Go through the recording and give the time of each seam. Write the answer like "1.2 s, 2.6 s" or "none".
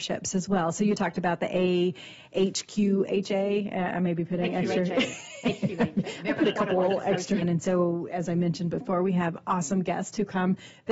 7.4 s